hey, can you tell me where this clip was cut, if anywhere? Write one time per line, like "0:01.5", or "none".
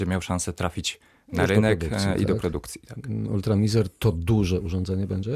none